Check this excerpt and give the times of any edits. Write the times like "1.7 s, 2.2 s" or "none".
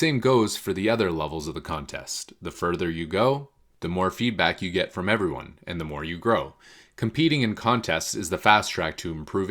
none